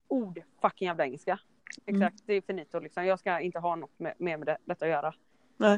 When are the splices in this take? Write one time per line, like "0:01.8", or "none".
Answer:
0:01.8